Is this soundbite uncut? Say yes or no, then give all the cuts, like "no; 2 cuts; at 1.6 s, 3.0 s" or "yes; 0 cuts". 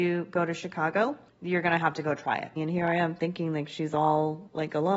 no; 1 cut; at 2.6 s